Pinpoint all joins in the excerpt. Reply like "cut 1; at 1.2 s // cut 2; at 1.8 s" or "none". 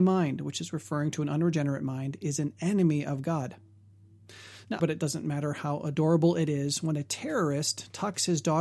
cut 1; at 4.8 s